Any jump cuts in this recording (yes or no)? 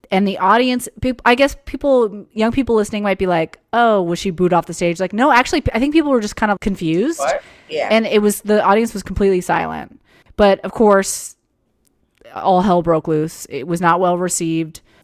yes